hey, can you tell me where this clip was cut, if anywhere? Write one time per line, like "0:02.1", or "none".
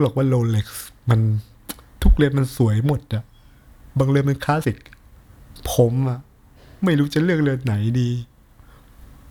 0:04.6